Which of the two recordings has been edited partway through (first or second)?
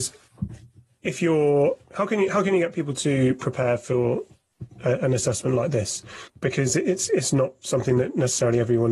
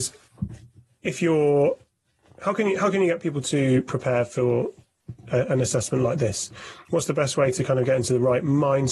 first